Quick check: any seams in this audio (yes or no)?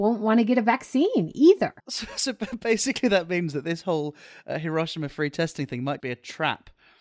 yes